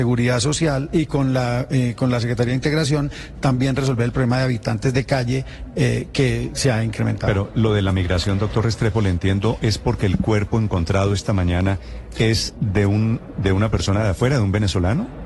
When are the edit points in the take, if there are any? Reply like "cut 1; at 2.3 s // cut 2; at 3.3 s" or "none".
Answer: none